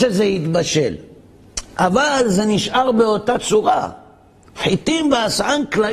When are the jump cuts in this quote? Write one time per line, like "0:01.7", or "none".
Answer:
none